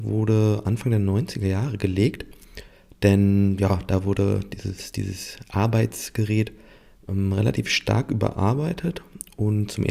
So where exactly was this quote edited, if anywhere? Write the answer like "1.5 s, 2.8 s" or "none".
none